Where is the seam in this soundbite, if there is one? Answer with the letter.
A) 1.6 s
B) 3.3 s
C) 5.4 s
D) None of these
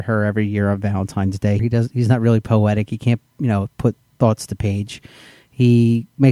A